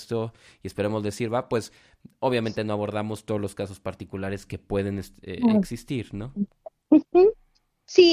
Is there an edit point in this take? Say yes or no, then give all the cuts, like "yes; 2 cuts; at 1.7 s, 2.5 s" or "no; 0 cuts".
no; 0 cuts